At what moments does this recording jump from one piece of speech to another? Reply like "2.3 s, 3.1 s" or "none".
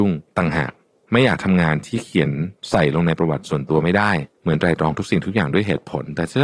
4.3 s